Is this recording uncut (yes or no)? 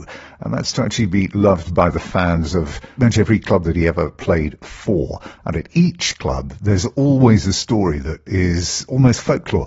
no